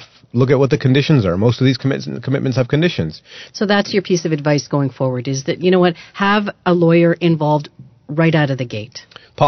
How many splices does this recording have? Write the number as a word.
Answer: one